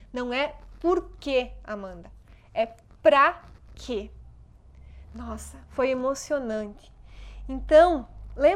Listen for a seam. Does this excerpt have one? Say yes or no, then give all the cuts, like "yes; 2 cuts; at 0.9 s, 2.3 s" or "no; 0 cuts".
no; 0 cuts